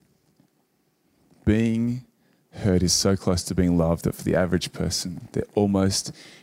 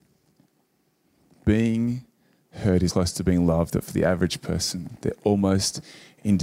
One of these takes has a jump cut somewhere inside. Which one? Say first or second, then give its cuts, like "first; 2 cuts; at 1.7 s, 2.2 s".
second; 1 cut; at 2.9 s